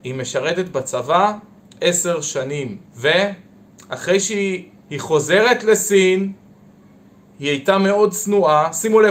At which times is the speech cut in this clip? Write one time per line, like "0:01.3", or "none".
0:02.9
0:04.8